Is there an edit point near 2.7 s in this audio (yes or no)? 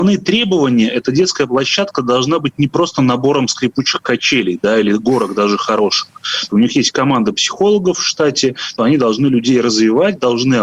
no